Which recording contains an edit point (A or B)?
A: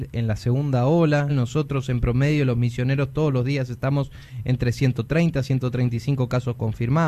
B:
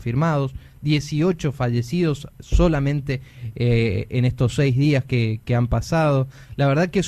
A